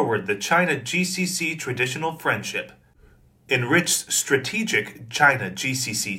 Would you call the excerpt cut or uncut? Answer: uncut